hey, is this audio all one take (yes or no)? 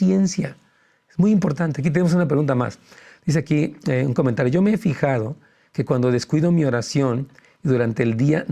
yes